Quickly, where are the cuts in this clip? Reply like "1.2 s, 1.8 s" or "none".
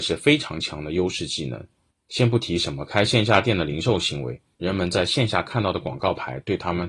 1.9 s, 4.5 s